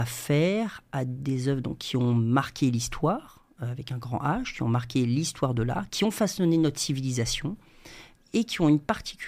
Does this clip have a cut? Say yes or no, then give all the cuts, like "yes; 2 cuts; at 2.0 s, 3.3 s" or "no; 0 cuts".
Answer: yes; 2 cuts; at 5.9 s, 8.1 s